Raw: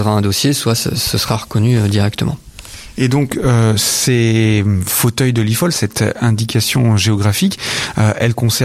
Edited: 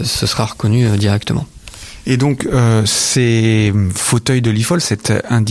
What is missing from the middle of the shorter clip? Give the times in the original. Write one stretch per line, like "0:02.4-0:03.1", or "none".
none